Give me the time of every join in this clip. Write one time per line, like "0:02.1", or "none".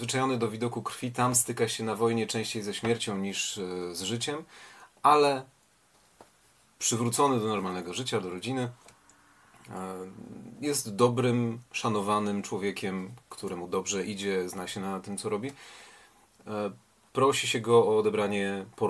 none